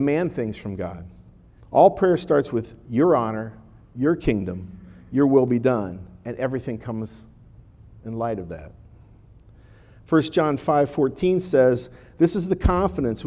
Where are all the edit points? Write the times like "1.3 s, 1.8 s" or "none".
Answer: 1.6 s